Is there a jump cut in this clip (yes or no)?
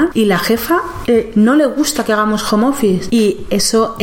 yes